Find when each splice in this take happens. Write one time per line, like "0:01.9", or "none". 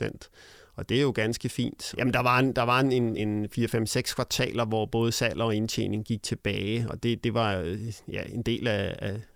0:01.9
0:03.2